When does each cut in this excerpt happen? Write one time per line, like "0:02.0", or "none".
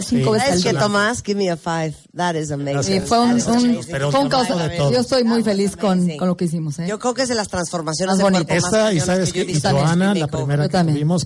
none